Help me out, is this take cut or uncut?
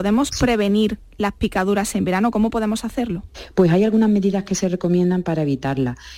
uncut